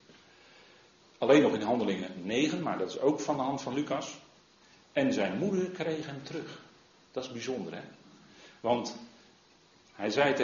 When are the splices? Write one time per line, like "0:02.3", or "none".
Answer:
none